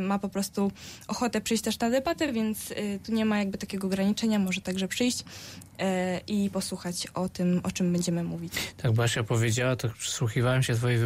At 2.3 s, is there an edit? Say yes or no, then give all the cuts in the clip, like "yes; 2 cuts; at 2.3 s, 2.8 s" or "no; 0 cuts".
no; 0 cuts